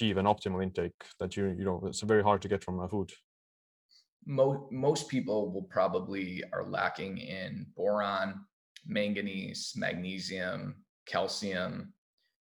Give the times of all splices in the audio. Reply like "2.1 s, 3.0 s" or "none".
none

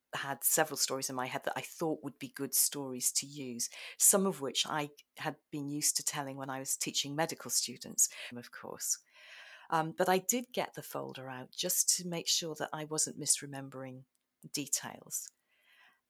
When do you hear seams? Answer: 8.3 s

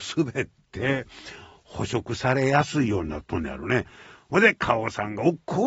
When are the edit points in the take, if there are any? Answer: none

